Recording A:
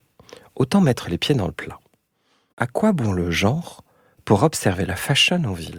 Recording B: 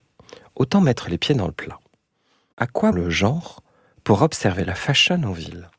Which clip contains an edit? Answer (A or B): B